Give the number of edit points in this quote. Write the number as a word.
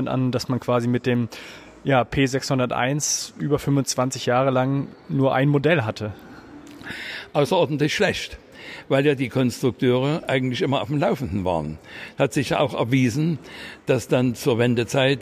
zero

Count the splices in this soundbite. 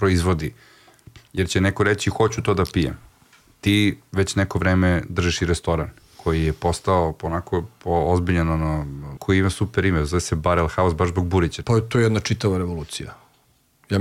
two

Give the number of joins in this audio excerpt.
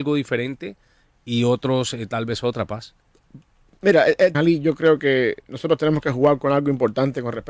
one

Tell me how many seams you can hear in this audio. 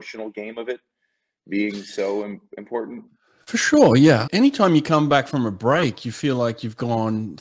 one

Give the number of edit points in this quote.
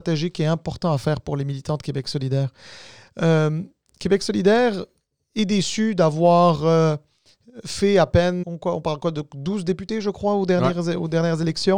one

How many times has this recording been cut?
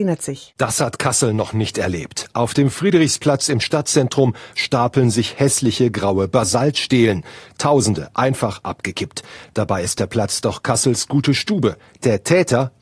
zero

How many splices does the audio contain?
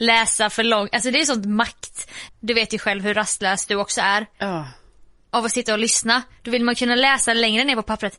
one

